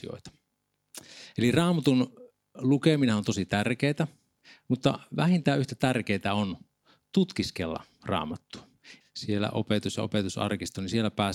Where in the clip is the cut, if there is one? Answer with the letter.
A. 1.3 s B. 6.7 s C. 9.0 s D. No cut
C